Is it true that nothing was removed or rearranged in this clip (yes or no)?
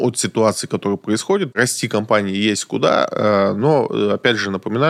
no